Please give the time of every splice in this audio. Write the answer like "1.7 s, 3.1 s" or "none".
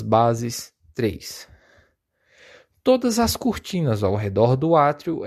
none